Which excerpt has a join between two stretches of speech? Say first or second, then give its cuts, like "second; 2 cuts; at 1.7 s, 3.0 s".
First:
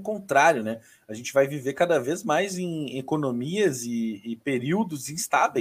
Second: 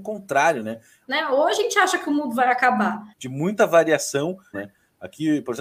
second; 3 cuts; at 1.0 s, 3.1 s, 4.5 s